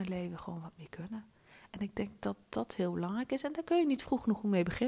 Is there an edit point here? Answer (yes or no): no